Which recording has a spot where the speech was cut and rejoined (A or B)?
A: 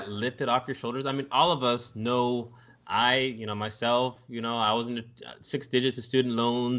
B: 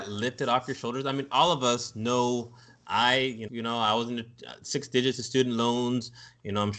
B